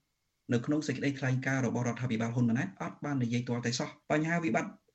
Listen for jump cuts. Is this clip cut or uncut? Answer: cut